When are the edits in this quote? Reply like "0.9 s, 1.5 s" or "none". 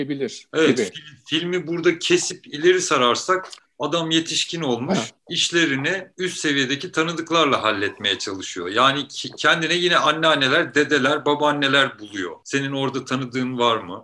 none